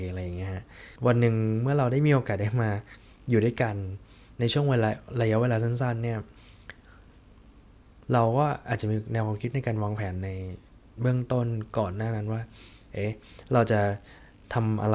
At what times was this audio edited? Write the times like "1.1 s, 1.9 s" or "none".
1.0 s

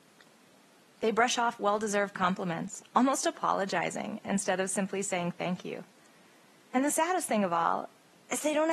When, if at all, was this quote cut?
6.7 s

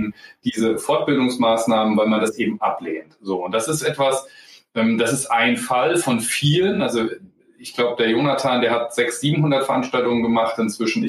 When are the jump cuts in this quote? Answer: none

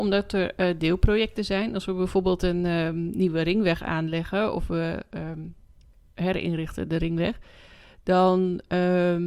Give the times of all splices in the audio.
none

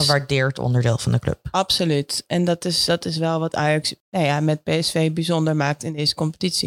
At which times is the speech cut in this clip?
2.9 s

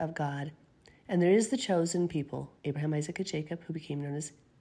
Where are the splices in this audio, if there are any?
2.6 s

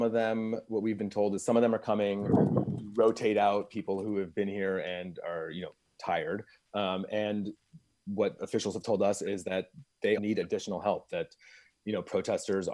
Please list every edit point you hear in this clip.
10.2 s

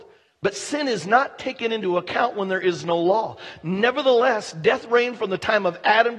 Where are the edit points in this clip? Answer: none

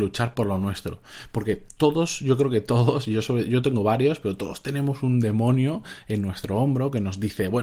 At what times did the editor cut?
none

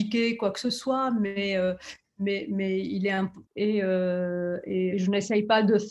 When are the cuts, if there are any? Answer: 3.4 s, 4.9 s

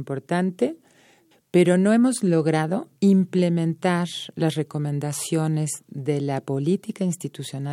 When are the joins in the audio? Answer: 1.3 s, 3.0 s

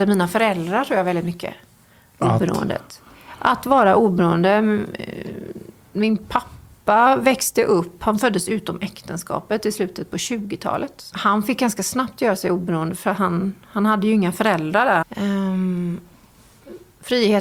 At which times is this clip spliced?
11.1 s, 15.0 s

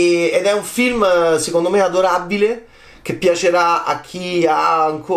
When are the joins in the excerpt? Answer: none

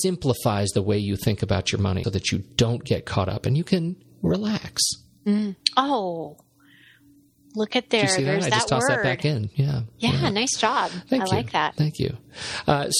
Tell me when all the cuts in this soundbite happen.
2.0 s

